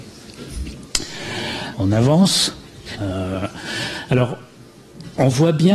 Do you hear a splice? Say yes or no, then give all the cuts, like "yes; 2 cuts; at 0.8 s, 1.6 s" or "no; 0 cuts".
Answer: yes; 2 cuts; at 1.7 s, 3.0 s